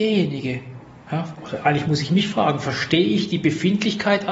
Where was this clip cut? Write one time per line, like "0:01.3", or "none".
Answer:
none